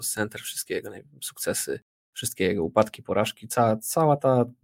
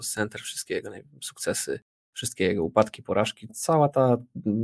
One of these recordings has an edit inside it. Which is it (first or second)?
second